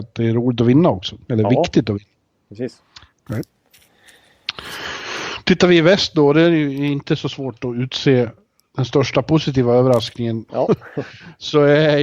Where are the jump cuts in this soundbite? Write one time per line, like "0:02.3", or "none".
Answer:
0:03.3
0:10.5